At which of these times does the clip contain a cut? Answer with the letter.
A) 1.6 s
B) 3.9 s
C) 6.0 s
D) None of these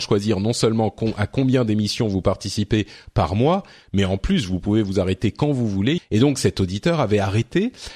C